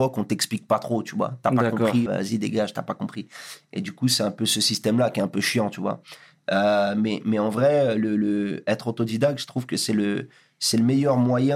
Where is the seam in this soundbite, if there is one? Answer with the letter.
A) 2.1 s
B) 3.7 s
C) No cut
A